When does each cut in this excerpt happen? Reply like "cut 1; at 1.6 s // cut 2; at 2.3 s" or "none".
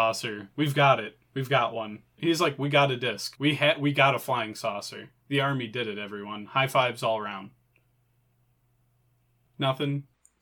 cut 1; at 2.2 s